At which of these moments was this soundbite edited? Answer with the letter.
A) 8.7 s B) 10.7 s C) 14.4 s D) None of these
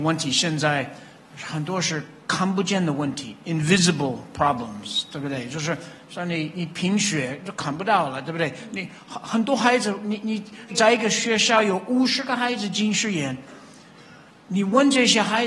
B